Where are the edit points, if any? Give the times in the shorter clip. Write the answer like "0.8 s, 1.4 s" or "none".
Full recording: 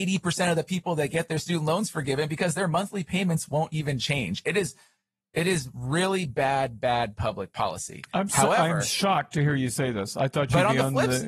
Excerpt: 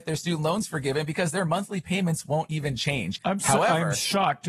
3.2 s